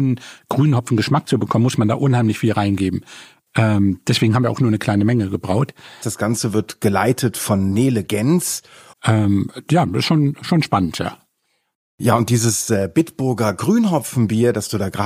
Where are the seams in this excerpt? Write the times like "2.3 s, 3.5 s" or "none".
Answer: 6.0 s, 8.9 s

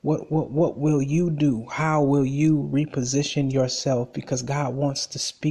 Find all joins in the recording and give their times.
none

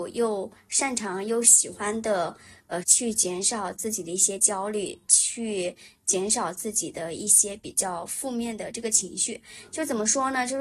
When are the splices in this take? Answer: 2.8 s

